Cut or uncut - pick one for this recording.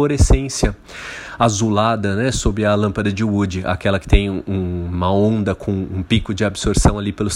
uncut